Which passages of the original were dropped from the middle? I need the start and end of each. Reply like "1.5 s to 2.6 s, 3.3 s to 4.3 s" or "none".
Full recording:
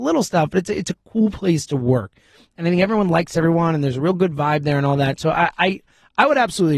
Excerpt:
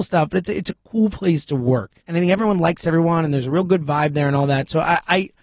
2.2 s to 2.5 s